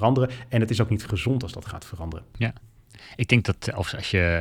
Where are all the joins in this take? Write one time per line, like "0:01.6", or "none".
none